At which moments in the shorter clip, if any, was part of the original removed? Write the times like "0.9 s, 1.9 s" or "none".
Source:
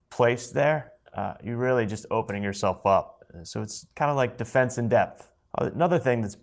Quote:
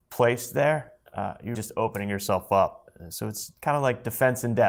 1.5 s